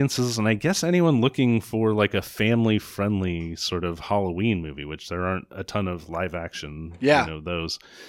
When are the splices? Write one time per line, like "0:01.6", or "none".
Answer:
none